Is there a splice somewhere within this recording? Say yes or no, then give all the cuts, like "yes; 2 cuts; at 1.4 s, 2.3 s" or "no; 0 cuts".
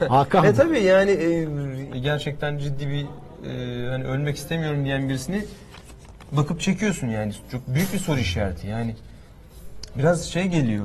yes; 1 cut; at 1.9 s